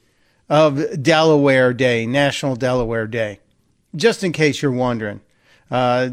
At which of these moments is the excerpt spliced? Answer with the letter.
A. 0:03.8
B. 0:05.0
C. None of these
C